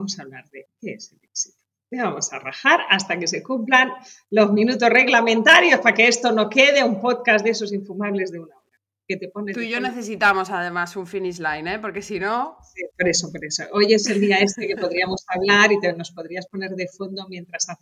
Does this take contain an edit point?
no; 0 cuts

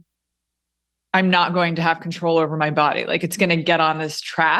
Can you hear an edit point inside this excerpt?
no; 0 cuts

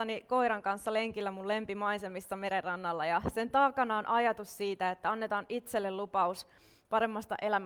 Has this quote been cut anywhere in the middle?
no; 0 cuts

